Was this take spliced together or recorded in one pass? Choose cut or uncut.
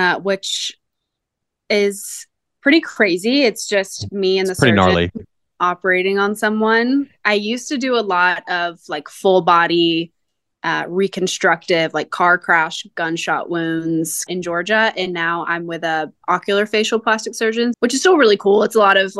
cut